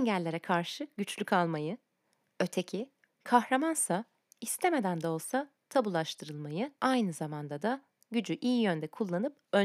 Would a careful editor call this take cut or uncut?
cut